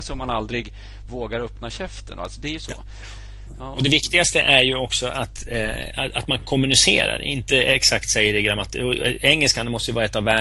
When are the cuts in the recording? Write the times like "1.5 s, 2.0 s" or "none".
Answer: none